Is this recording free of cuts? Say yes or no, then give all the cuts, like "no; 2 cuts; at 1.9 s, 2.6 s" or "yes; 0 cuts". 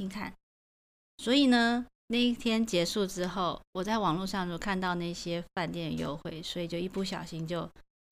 no; 1 cut; at 1.9 s